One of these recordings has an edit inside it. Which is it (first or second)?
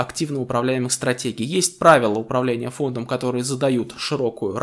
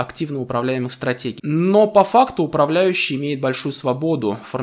second